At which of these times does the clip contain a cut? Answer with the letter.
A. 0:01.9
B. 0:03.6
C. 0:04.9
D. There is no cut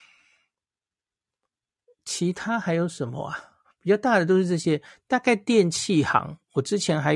B